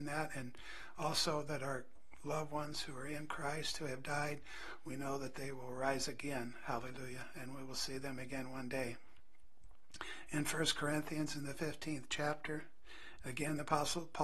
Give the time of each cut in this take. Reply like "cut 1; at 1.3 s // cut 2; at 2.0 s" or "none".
cut 1; at 13.2 s